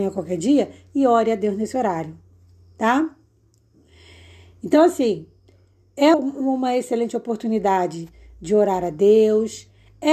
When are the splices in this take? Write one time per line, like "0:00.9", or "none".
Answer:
0:06.1